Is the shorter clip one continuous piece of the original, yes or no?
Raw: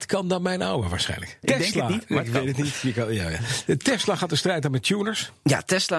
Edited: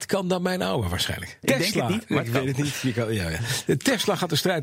yes